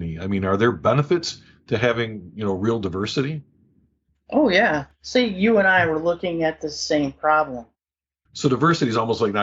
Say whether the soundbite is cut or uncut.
cut